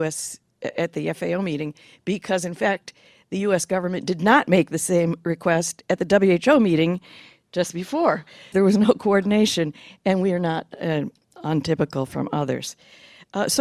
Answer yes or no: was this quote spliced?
yes